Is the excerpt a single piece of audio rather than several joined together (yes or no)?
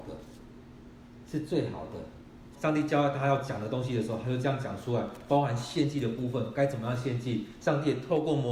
no